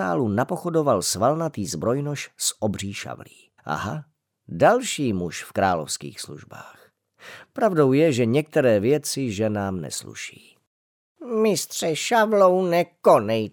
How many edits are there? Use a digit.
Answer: 1